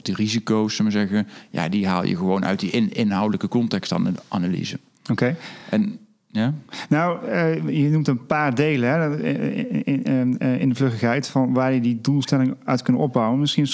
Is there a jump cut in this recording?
no; 0 cuts

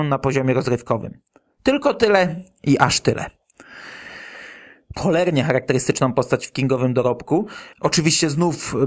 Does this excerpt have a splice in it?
yes; 2 cuts; at 4.9 s, 7.7 s

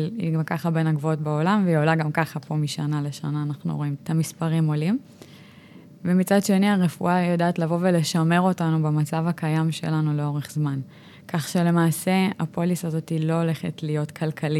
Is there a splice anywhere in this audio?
yes; 1 cut; at 4.0 s

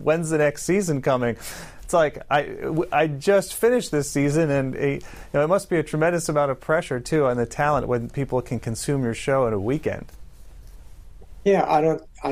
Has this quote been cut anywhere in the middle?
no; 0 cuts

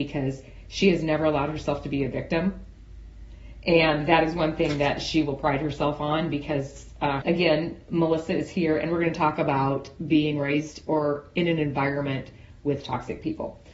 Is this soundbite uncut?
no; 1 cut; at 7.2 s

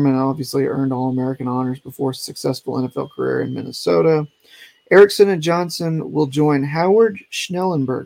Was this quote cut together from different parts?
no; 0 cuts

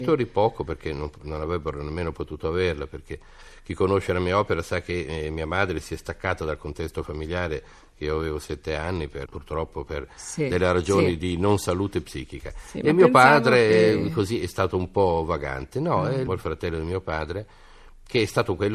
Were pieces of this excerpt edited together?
yes; 2 cuts; at 9.3 s, 16.3 s

